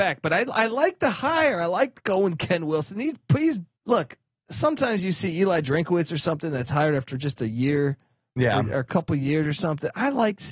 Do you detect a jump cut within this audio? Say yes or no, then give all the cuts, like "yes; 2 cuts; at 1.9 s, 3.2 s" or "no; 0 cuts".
yes; 1 cut; at 3.7 s